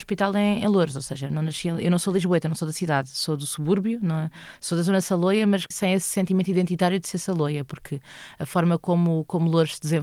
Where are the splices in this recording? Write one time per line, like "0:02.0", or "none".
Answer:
0:05.7